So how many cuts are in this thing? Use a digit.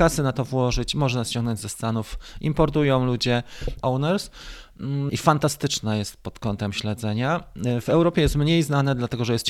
2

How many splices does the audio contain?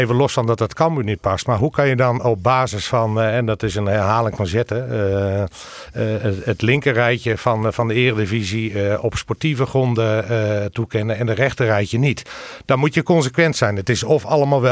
0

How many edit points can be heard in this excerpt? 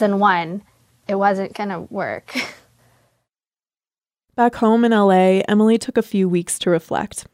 0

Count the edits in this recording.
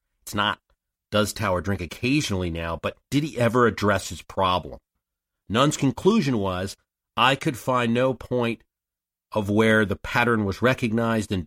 0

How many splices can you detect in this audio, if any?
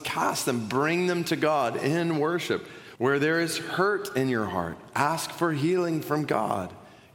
1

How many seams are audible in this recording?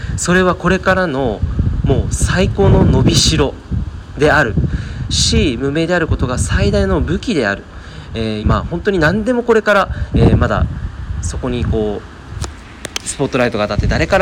2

